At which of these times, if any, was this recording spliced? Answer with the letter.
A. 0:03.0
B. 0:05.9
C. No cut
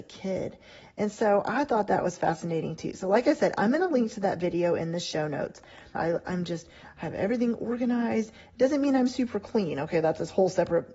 B